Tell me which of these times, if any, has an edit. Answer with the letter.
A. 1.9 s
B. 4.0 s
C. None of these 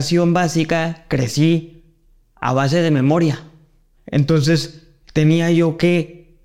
B